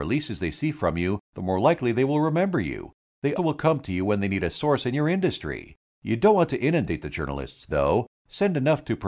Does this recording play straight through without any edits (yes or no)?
no